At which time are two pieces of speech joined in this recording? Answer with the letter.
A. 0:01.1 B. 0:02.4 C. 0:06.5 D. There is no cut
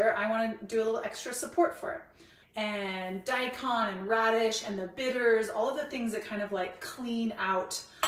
B